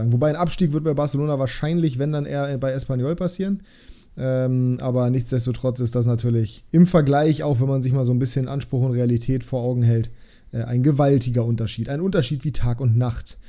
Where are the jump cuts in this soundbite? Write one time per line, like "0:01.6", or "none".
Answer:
0:06.7